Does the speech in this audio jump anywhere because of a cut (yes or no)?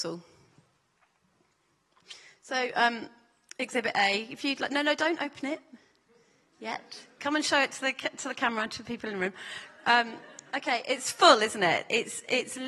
no